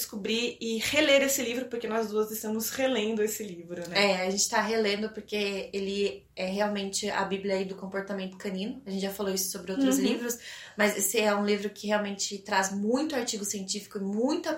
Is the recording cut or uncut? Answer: uncut